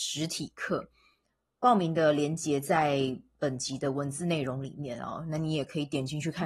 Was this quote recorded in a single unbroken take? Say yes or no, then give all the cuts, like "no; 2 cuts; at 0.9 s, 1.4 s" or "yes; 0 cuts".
yes; 0 cuts